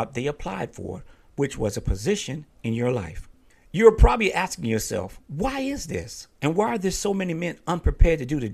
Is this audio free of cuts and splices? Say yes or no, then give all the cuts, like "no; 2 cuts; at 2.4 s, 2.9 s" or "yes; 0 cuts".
yes; 0 cuts